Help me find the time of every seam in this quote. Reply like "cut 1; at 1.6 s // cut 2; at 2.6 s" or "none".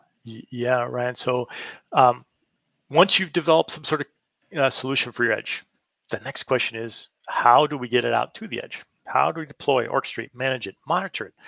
none